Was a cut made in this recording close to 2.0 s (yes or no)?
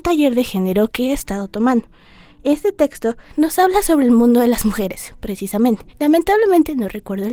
no